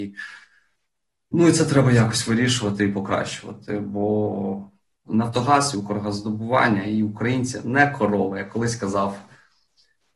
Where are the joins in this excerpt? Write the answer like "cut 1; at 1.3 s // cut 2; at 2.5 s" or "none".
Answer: cut 1; at 5.1 s